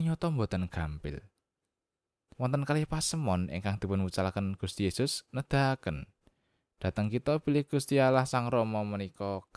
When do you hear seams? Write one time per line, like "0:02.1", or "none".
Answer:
0:02.3